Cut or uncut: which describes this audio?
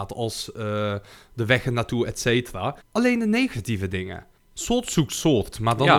cut